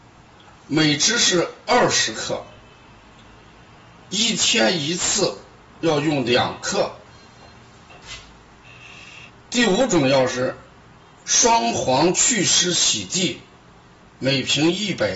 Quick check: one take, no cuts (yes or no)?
no